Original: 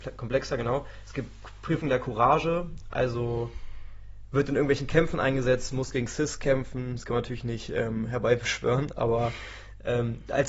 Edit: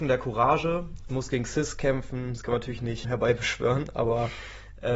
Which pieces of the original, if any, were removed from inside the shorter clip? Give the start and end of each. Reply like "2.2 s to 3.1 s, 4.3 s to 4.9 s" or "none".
2.9 s to 5.7 s, 7.7 s to 8.1 s